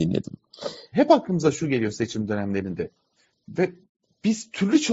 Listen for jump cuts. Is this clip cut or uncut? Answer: cut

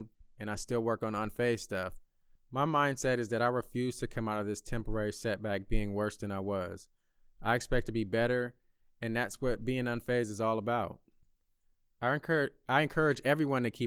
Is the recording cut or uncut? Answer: cut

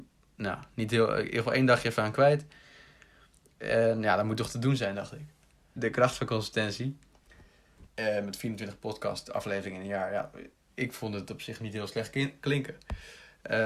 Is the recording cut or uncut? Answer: cut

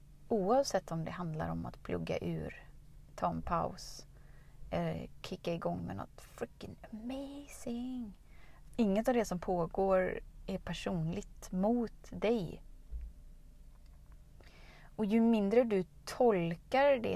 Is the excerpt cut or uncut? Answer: cut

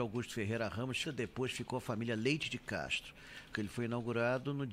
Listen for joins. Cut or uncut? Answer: cut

